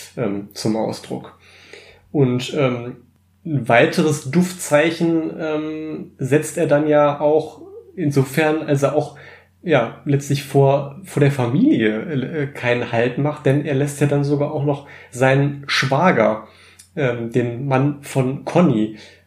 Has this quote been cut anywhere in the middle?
no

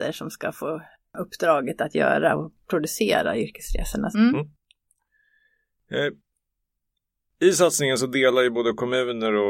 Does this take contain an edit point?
yes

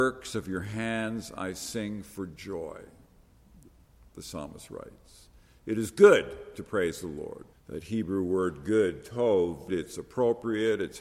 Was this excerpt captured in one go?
no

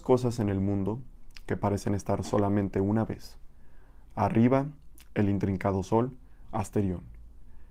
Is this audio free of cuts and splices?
no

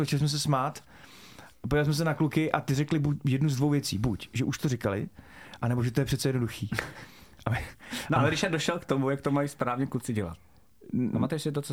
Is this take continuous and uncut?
yes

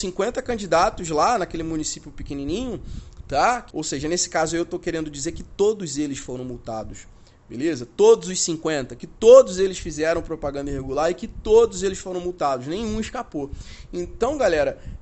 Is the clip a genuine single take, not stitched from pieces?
no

